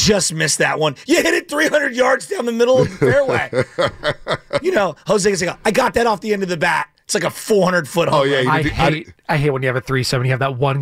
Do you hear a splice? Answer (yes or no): no